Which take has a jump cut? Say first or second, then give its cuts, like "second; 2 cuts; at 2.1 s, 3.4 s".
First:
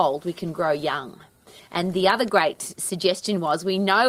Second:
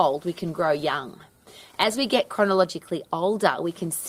first; 1 cut; at 1.6 s